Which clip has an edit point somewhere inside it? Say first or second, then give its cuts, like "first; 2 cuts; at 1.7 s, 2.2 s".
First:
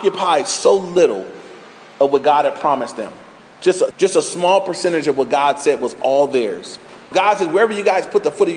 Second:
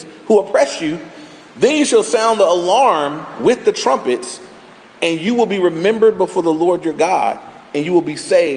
first; 2 cuts; at 3.9 s, 7.1 s